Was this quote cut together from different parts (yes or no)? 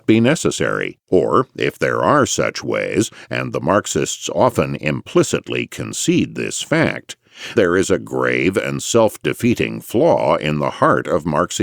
yes